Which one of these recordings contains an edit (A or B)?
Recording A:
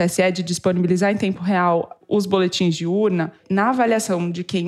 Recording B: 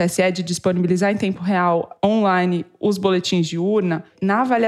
A